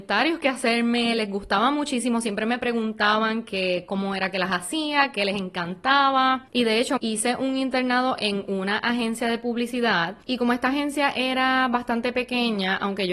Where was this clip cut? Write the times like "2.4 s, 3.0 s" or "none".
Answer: 7.0 s